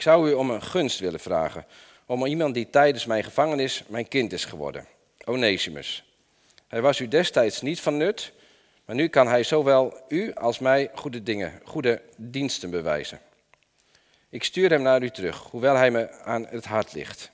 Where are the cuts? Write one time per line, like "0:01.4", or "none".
none